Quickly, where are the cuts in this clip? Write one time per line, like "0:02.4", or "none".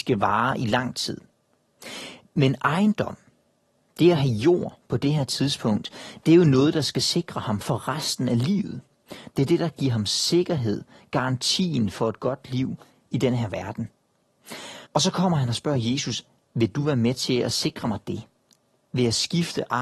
0:09.3
0:14.8

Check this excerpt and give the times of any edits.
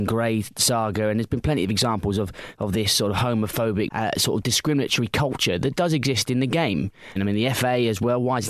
0:03.9
0:07.2

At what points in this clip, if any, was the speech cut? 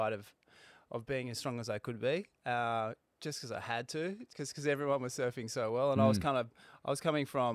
none

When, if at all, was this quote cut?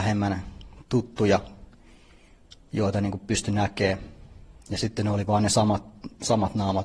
none

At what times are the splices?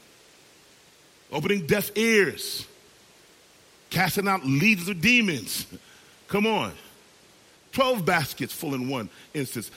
0:07.6

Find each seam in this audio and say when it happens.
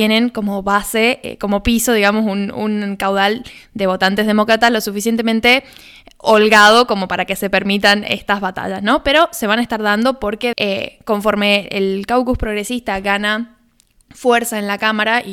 0:10.5

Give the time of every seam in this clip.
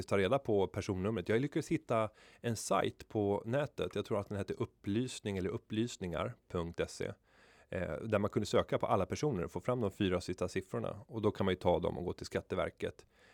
none

